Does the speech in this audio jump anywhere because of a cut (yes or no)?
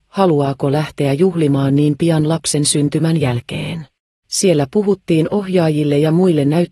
yes